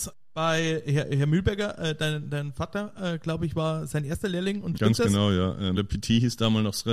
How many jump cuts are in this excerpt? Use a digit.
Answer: 2